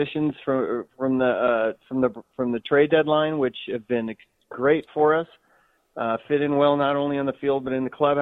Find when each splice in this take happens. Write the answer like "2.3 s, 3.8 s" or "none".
none